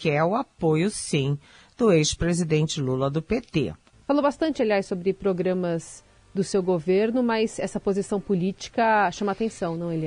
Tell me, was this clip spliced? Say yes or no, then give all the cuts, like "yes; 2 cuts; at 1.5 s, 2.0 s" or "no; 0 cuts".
yes; 1 cut; at 3.9 s